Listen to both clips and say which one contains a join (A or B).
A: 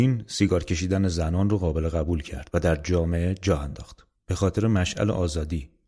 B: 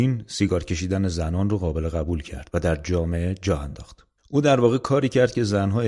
A